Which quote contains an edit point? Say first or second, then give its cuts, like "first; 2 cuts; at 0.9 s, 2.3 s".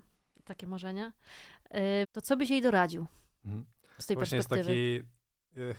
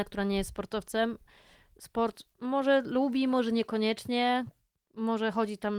first; 1 cut; at 2.0 s